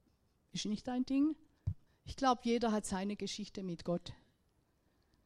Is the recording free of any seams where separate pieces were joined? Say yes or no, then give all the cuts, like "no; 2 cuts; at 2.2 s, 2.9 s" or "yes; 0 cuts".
no; 1 cut; at 1.9 s